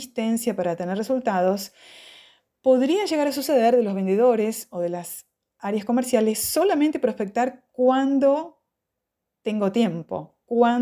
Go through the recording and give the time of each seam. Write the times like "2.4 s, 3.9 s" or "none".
none